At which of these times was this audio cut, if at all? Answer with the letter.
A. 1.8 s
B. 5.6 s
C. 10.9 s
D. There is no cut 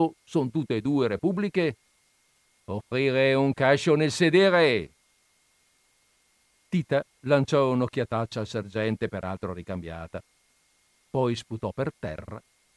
C